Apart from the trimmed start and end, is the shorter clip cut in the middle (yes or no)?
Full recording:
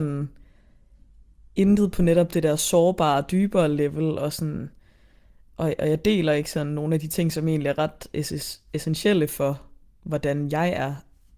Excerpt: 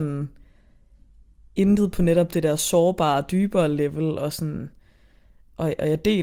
no